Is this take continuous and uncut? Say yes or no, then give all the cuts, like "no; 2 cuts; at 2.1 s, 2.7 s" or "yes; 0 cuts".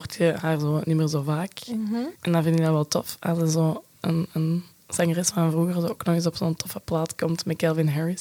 no; 1 cut; at 2.1 s